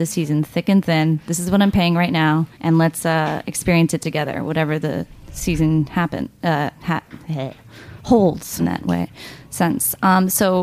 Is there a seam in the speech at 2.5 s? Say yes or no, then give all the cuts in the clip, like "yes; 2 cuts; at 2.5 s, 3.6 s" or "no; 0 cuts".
yes; 2 cuts; at 2.5 s, 8.6 s